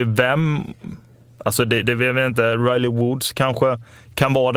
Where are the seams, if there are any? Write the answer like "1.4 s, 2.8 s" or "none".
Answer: none